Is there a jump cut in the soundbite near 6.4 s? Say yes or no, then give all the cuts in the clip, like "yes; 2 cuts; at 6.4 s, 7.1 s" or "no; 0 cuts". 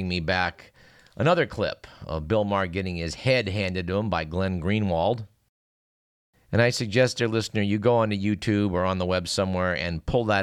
no; 0 cuts